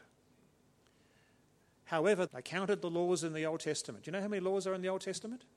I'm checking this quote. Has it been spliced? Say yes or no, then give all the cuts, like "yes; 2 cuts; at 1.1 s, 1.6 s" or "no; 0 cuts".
yes; 1 cut; at 2.3 s